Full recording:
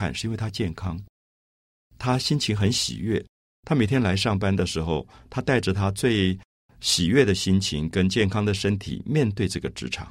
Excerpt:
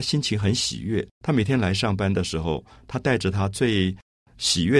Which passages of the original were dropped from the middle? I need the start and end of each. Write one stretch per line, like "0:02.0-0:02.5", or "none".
0:03.3-0:03.6